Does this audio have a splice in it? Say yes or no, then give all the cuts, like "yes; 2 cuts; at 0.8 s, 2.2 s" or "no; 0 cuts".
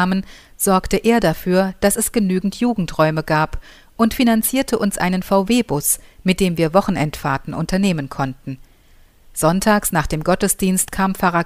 no; 0 cuts